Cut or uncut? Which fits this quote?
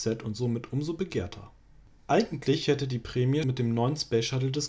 cut